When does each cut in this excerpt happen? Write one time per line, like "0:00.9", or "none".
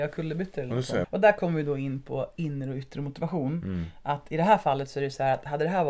0:01.0